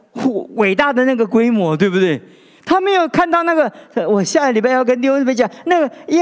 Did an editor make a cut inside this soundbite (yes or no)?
no